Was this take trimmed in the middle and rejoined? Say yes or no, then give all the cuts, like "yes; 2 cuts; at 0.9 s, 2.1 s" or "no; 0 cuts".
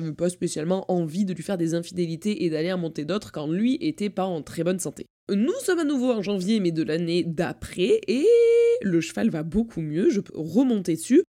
yes; 1 cut; at 10.3 s